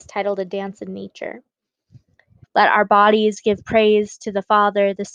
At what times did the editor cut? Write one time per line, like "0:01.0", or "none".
0:02.4